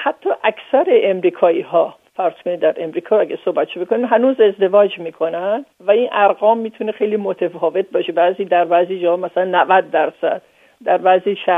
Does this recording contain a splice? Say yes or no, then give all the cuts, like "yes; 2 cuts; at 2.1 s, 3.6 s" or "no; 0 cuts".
yes; 1 cut; at 5.7 s